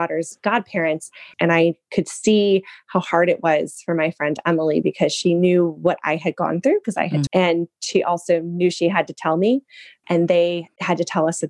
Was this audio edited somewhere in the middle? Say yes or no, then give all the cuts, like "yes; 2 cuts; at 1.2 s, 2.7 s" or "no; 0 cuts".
yes; 3 cuts; at 1.3 s, 7.3 s, 10.0 s